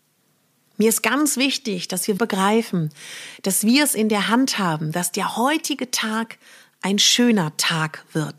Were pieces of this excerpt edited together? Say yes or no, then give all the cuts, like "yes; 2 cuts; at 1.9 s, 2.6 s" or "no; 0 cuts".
yes; 1 cut; at 2.2 s